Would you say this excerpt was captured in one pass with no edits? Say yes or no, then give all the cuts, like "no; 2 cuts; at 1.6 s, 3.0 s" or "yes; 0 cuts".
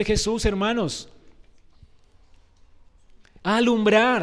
yes; 0 cuts